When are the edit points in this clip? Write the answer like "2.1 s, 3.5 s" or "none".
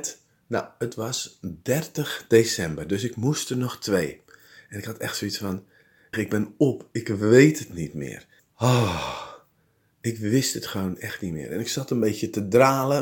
6.1 s, 8.4 s